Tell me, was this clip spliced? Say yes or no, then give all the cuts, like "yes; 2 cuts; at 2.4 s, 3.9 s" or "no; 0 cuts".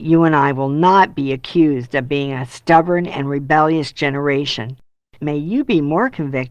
yes; 1 cut; at 5.0 s